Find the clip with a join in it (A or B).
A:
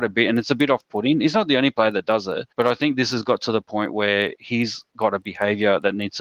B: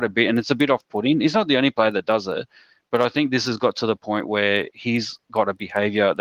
A